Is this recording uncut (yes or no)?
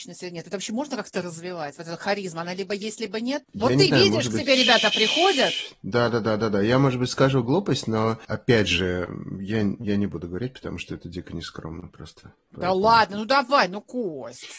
yes